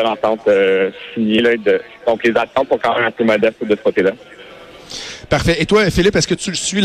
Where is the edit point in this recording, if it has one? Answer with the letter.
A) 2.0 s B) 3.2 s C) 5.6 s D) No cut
D